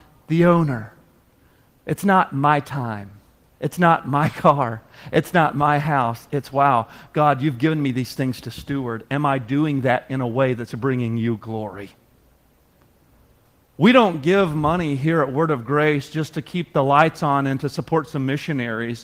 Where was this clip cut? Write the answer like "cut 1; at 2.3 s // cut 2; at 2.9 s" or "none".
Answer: cut 1; at 3.5 s